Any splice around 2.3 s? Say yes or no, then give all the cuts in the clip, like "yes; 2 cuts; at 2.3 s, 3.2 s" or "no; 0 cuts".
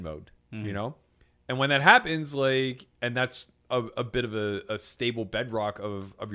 no; 0 cuts